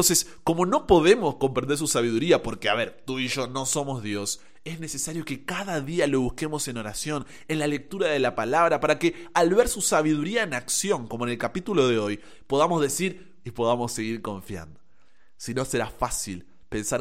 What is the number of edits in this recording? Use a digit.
1